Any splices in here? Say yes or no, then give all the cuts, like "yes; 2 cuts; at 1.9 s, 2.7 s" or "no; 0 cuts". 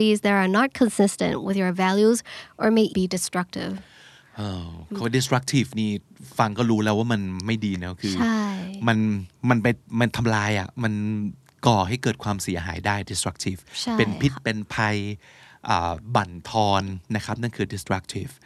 yes; 1 cut; at 2.9 s